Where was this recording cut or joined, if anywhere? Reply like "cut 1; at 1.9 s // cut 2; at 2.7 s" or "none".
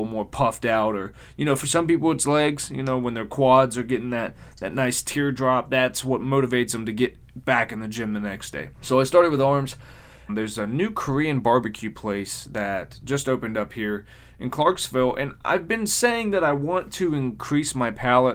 cut 1; at 8.7 s // cut 2; at 10.3 s